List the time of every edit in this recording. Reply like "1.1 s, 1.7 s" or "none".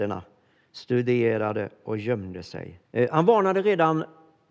2.8 s

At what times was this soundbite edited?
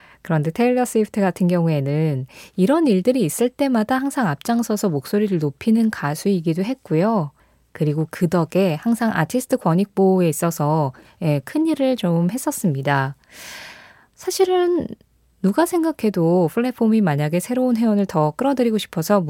none

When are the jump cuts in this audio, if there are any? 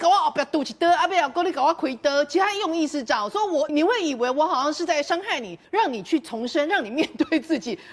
3.7 s, 5.6 s

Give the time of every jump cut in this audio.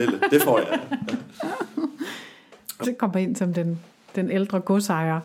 2.8 s

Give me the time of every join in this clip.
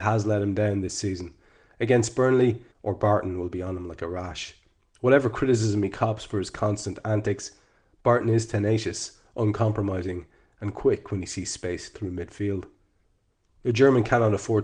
2.7 s

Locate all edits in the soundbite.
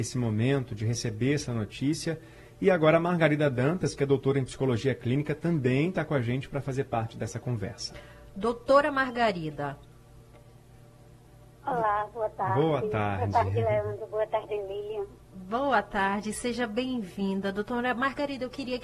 none

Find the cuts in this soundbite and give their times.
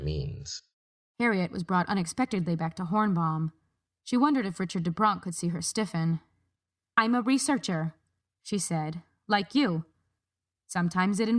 none

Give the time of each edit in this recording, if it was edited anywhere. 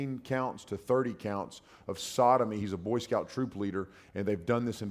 none

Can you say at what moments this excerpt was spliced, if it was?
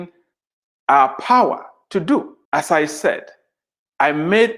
2.5 s

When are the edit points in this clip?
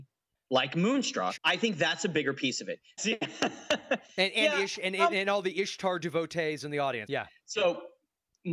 1.4 s, 3.0 s, 7.1 s

